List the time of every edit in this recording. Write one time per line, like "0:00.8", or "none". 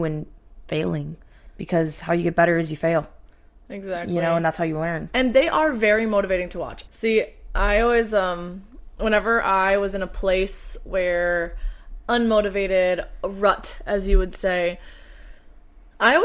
0:05.1
0:06.9

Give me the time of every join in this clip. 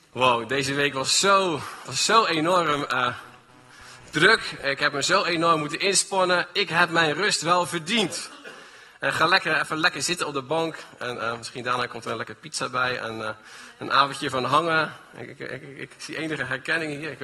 none

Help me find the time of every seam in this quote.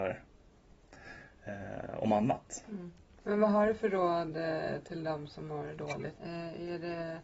0:03.2
0:06.2

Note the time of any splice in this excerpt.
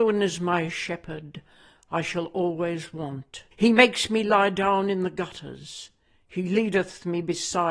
0:03.5

